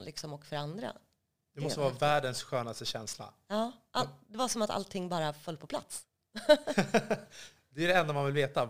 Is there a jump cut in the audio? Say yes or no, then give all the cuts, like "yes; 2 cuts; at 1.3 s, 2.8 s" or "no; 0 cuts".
no; 0 cuts